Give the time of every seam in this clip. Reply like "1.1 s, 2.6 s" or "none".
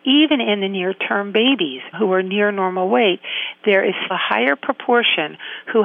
4.1 s